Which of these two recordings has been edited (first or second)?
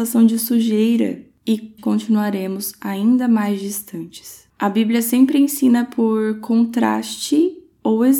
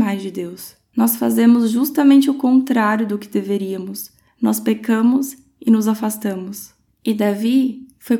first